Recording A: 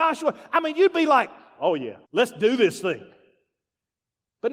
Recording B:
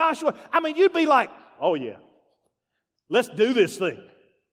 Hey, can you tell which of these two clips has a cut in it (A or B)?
A